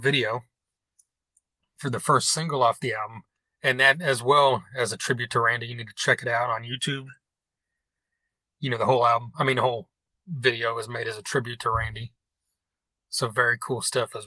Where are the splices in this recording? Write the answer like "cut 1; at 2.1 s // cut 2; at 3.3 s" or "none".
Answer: none